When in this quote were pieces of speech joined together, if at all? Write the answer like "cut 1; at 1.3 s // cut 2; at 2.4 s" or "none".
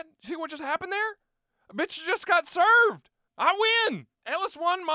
cut 1; at 3.3 s